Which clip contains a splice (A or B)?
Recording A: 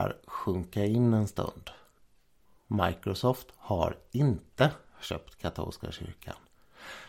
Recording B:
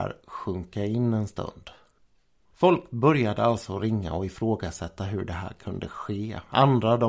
B